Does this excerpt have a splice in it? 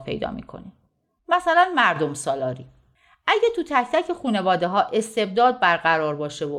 no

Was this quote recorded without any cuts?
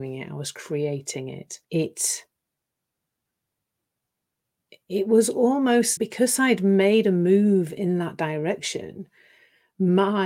no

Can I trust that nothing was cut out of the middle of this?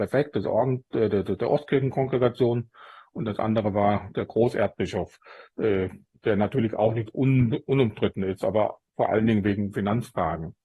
yes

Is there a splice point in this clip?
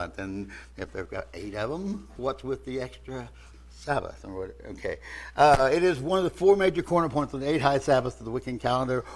yes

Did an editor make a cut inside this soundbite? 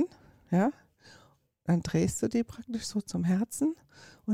no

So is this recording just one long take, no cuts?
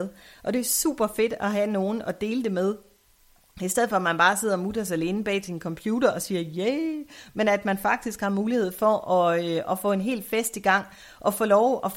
yes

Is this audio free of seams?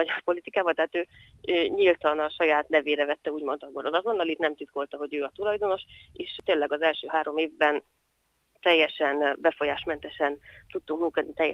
yes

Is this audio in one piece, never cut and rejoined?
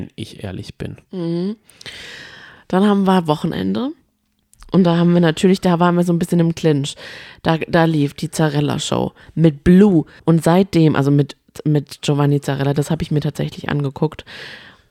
no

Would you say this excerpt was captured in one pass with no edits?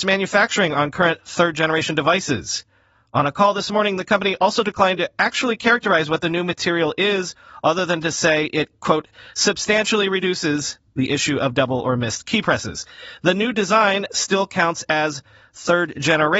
yes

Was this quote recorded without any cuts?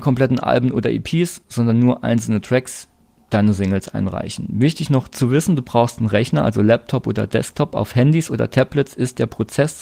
yes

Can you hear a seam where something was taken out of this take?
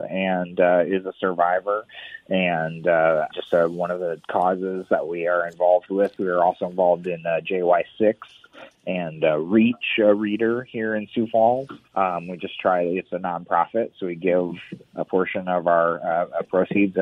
yes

